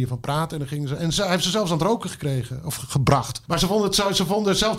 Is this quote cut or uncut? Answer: cut